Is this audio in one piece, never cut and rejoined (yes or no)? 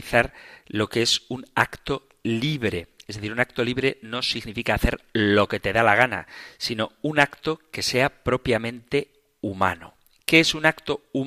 yes